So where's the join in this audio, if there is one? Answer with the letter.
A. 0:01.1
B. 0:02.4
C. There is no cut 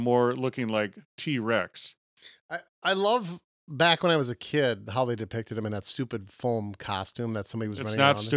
A